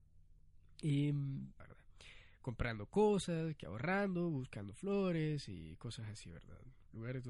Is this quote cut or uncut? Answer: cut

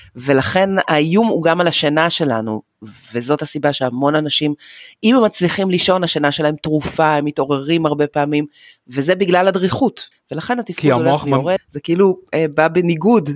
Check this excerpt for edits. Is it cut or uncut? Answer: cut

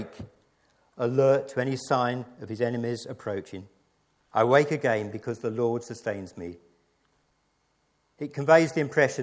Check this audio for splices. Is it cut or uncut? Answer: cut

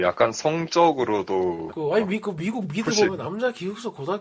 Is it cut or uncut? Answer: cut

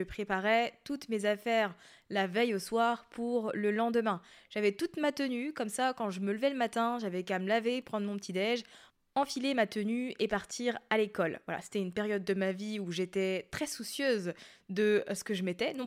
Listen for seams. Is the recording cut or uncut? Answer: uncut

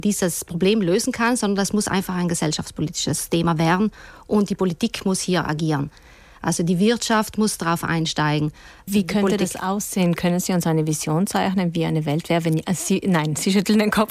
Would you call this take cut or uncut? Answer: uncut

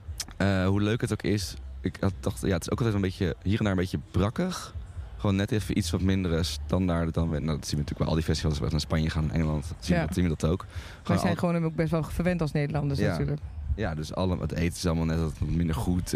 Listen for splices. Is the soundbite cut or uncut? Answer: uncut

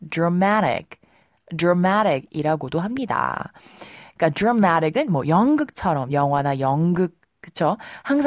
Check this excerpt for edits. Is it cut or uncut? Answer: uncut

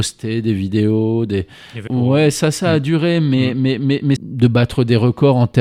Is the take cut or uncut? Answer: cut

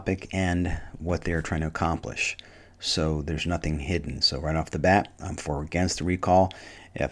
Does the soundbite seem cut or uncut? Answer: uncut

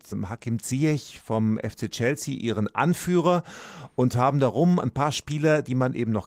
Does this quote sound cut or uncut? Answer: uncut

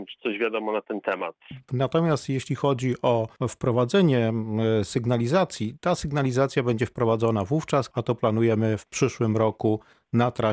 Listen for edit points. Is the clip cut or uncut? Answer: cut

